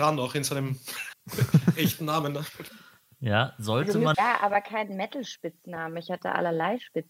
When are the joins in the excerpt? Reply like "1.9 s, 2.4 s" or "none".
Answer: 4.1 s